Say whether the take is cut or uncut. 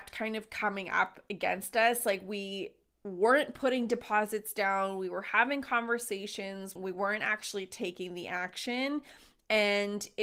cut